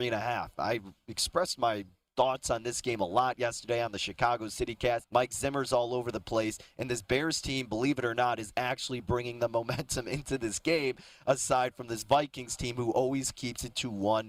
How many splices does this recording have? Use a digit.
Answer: 1